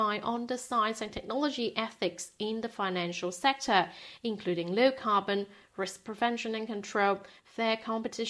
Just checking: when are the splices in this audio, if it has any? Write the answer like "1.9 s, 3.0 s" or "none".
none